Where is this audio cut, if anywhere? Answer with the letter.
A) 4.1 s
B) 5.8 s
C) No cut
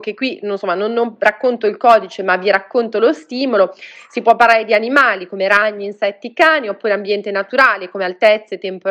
C